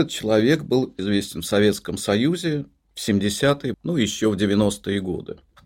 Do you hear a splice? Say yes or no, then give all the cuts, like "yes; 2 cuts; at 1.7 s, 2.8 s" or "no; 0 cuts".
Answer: yes; 2 cuts; at 1.0 s, 3.7 s